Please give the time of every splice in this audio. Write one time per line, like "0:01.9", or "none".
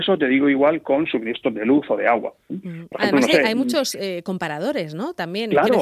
0:02.4